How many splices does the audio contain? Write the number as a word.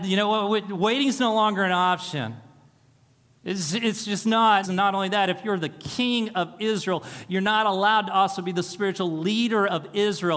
one